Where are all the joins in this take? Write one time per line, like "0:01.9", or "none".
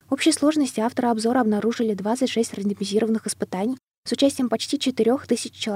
none